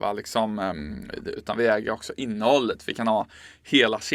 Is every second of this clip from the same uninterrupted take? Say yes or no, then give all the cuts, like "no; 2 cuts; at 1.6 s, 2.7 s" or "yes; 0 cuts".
no; 1 cut; at 1.4 s